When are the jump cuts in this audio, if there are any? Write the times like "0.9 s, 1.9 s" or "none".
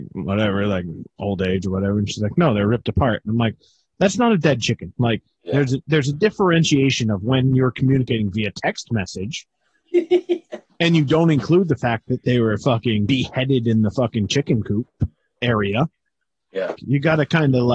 5.0 s, 13.1 s, 16.8 s